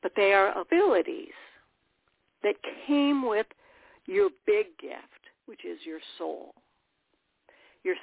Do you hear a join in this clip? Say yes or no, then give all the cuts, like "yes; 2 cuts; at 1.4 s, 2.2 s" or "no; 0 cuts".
no; 0 cuts